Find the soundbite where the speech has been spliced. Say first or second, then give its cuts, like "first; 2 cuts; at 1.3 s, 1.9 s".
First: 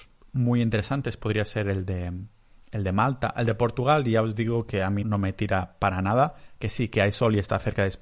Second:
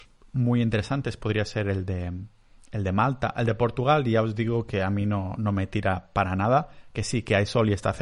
first; 1 cut; at 5.0 s